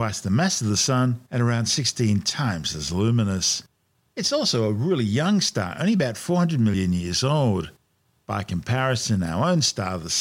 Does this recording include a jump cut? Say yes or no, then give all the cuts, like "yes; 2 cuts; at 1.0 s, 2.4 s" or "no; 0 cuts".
no; 0 cuts